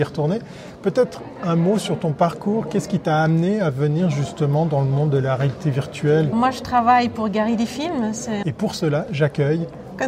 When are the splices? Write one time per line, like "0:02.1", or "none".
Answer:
0:06.3
0:08.4